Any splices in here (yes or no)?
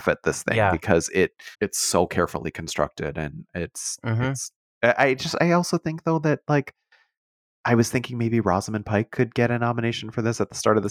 yes